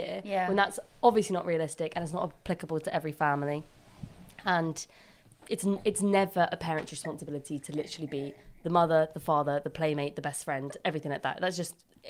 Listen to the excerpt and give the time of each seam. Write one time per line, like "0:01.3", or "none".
none